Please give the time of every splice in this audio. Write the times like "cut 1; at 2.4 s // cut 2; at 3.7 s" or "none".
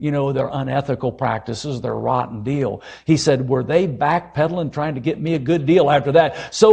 none